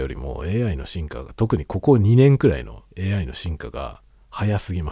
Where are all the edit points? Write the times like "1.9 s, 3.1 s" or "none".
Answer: 2.9 s